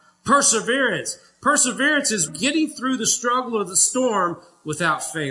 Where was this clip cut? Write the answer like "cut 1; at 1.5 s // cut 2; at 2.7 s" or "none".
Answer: cut 1; at 2.3 s